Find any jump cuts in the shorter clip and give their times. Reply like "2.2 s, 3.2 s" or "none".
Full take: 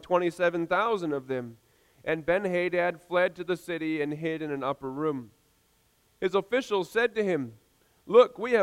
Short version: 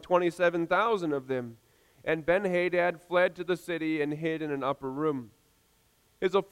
none